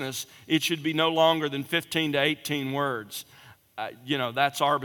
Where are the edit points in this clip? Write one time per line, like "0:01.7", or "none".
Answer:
none